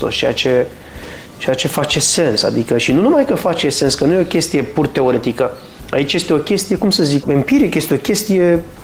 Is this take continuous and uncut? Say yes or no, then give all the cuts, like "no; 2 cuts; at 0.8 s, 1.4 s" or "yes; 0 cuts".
no; 1 cut; at 7.2 s